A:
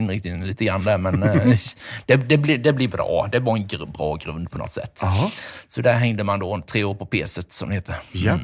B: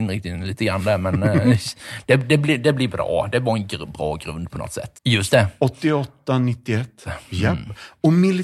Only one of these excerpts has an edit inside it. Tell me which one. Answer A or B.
B